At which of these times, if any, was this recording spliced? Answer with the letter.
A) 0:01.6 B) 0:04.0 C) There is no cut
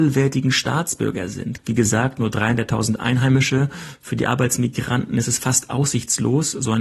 A